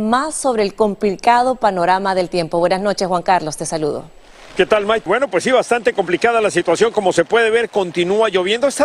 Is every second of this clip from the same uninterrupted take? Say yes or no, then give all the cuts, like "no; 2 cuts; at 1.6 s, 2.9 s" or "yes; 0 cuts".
no; 1 cut; at 5.1 s